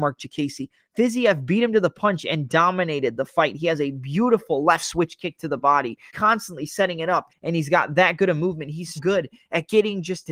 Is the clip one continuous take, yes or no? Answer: no